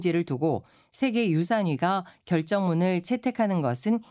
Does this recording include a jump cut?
no; 0 cuts

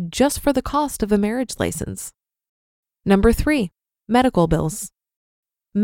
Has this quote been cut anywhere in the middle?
no; 0 cuts

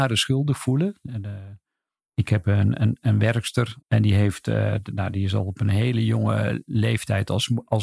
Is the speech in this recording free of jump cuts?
no; 1 cut; at 3.8 s

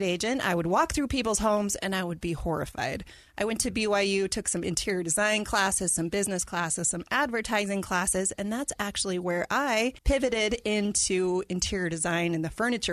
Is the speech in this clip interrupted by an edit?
yes; 1 cut; at 10.0 s

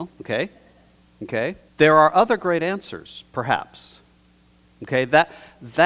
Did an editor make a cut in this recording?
yes; 1 cut; at 1.7 s

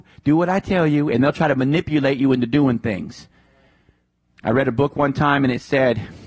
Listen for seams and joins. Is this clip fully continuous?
yes; 0 cuts

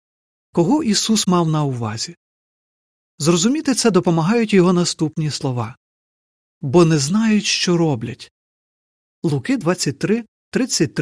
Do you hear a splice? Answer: no; 0 cuts

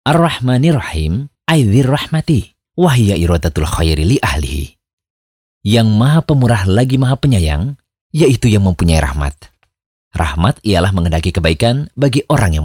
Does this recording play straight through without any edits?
yes; 0 cuts

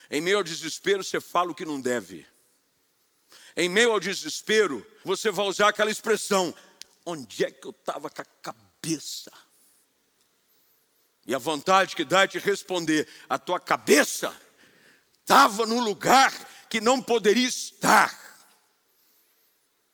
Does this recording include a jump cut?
yes; 1 cut; at 5.0 s

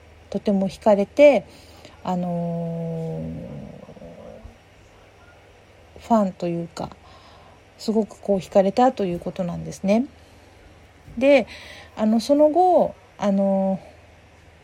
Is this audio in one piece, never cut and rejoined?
yes; 0 cuts

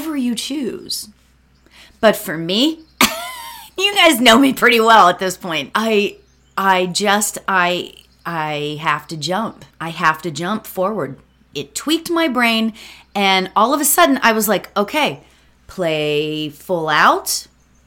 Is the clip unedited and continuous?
no; 3 cuts; at 5.7 s, 9.7 s, 11.5 s

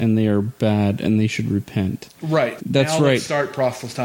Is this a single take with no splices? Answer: no; 1 cut; at 2.6 s

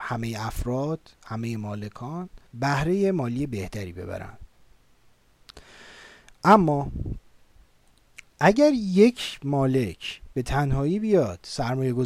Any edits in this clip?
yes; 1 cut; at 2.5 s

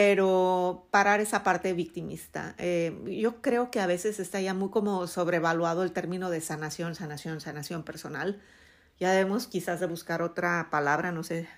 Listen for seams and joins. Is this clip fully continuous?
yes; 0 cuts

